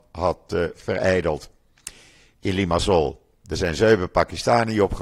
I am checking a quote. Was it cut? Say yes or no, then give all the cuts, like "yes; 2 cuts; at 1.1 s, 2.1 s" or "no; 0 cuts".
no; 0 cuts